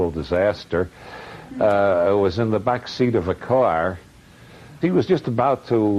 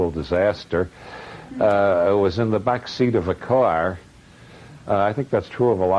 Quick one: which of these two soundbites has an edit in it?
first; 1 cut; at 4.8 s

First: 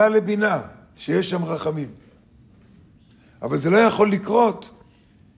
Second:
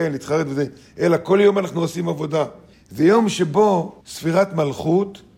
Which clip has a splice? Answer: second; 2 cuts; at 2.7 s, 4.0 s

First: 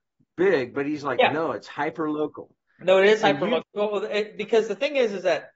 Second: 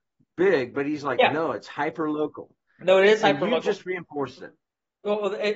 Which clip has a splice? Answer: first; 1 cut; at 3.6 s

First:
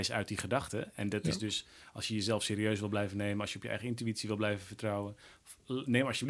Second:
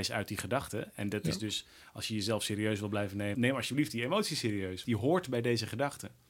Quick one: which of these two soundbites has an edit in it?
second; 2 cuts; at 3.3 s, 4.8 s

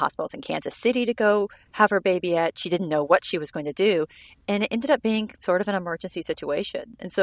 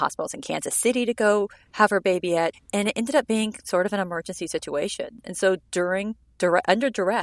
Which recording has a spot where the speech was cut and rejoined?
second; 1 cut; at 2.5 s

